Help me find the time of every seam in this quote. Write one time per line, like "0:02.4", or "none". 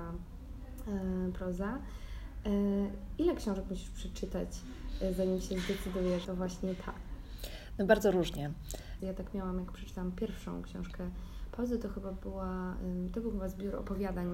0:06.2
0:09.0